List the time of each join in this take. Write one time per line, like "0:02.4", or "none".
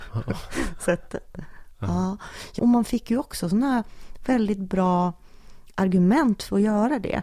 0:02.6